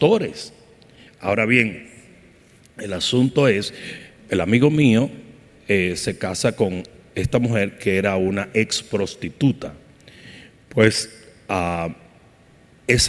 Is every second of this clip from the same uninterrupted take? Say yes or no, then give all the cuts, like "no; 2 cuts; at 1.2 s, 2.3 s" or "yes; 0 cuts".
no; 1 cut; at 1.1 s